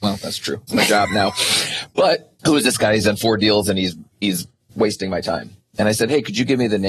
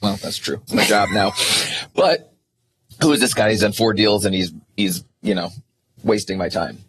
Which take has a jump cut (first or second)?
first